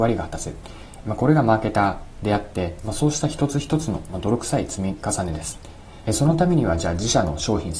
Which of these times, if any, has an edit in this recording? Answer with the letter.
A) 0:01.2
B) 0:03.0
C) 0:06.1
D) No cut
C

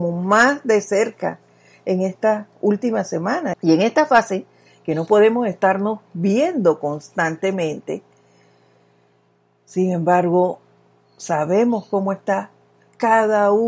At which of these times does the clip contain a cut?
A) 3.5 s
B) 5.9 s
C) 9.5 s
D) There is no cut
A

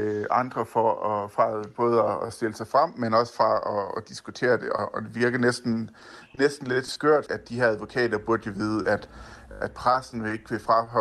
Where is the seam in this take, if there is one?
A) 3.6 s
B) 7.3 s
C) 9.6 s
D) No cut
B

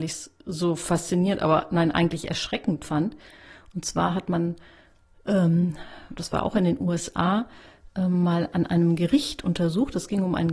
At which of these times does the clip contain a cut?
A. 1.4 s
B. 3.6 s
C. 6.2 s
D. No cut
C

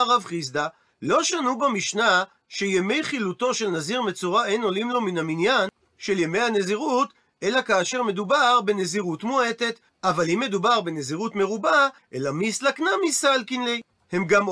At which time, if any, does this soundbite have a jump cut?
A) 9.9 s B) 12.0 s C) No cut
B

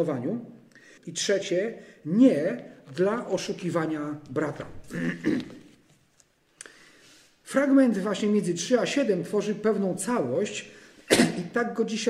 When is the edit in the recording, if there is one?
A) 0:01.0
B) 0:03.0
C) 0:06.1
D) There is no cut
A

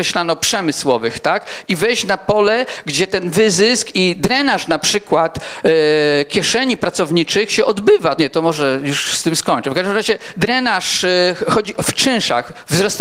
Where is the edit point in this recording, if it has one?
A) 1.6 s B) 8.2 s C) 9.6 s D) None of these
B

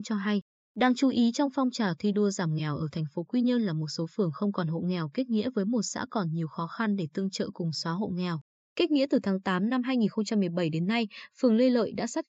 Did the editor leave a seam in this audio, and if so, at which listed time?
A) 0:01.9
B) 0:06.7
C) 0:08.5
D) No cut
D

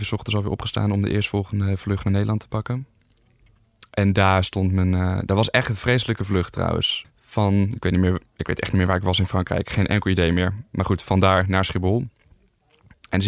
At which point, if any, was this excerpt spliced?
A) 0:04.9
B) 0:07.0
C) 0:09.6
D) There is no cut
B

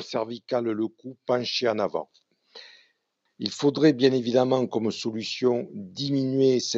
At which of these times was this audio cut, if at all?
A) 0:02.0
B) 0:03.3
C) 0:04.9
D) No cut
B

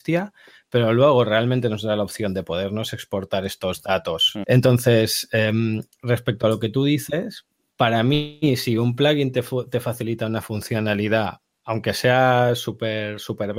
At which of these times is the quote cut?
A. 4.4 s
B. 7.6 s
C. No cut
A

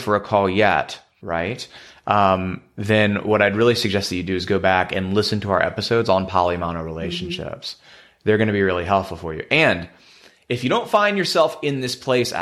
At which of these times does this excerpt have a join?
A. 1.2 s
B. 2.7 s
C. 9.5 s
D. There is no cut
A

